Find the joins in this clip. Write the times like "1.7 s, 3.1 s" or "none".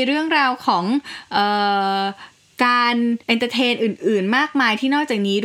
3.2 s